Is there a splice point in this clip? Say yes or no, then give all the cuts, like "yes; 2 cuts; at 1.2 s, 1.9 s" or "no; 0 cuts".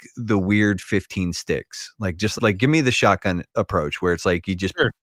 yes; 1 cut; at 2.4 s